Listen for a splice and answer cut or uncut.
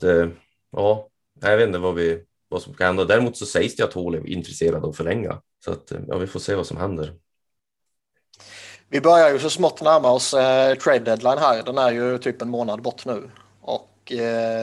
cut